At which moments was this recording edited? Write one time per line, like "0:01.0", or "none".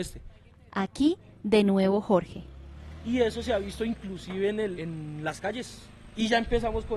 0:04.8